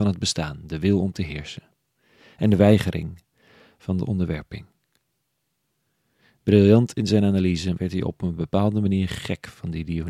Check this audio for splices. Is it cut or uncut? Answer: cut